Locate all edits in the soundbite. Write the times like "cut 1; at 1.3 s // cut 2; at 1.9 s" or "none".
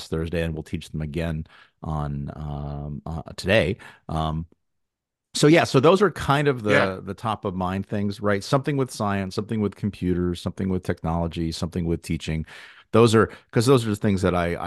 none